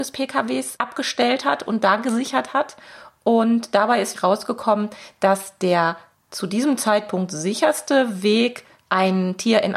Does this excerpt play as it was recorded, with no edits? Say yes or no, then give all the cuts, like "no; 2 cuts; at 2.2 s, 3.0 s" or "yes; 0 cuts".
yes; 0 cuts